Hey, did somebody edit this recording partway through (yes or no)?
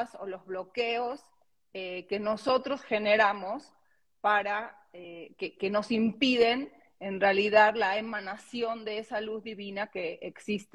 no